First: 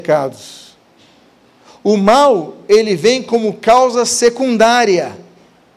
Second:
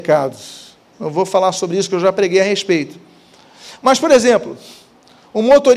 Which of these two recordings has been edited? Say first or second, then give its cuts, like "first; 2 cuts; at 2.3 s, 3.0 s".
second; 1 cut; at 0.9 s